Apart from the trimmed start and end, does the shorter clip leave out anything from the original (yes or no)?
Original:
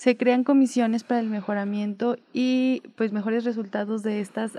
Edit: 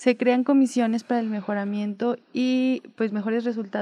no